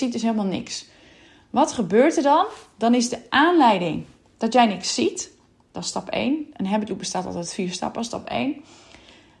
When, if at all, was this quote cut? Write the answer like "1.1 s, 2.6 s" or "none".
none